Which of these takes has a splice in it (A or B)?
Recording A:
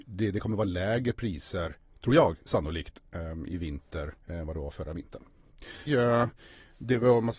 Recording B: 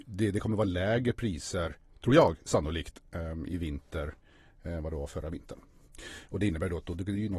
A